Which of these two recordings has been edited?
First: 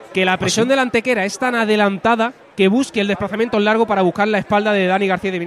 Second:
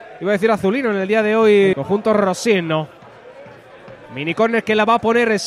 second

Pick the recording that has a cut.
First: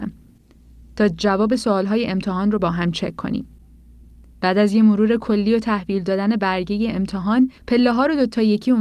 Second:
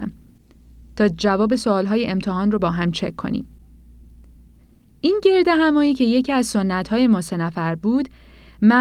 first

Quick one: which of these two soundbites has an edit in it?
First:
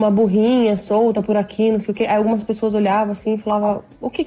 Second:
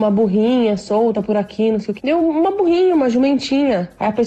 second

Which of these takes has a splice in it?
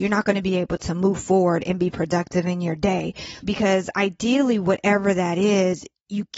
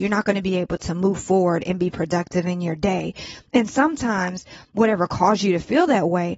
first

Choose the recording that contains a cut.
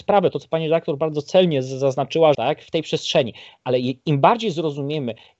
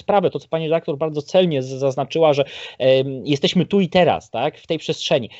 first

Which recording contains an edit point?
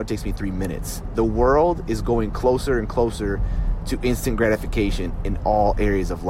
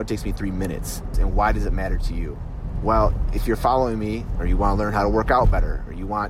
second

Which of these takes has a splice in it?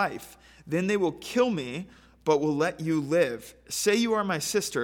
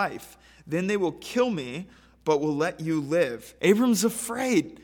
second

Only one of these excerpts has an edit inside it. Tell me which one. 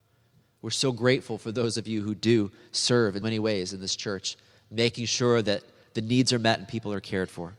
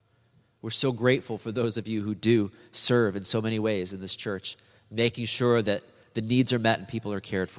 first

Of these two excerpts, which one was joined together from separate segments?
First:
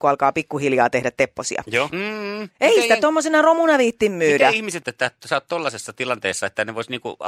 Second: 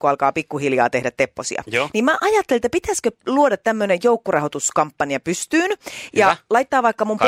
first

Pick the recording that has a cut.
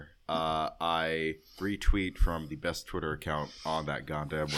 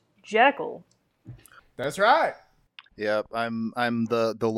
second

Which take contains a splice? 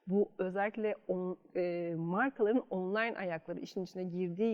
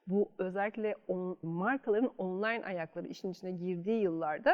second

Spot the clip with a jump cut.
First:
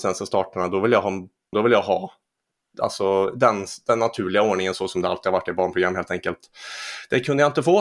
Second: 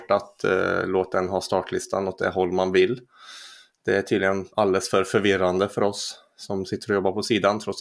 first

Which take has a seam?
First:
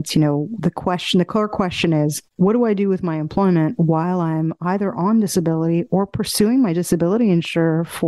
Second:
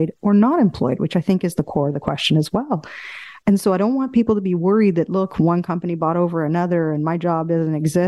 first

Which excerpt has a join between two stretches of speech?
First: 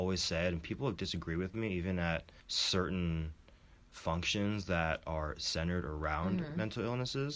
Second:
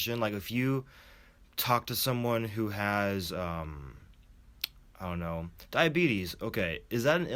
first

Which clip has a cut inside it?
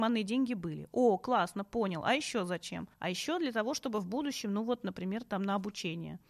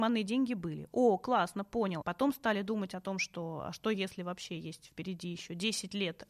second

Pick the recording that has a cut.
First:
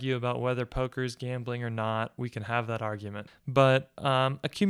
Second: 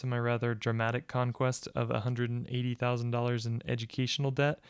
first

